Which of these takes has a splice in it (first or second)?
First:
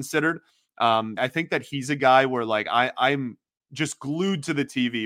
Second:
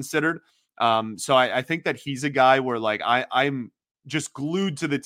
first